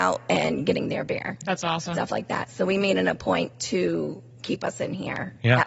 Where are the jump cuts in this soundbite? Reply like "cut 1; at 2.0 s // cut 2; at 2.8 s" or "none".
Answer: cut 1; at 1.9 s